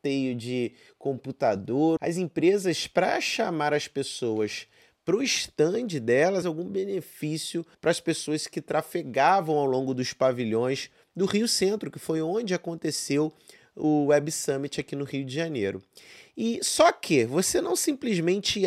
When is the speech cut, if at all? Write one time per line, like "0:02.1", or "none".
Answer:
0:02.0
0:06.4
0:07.7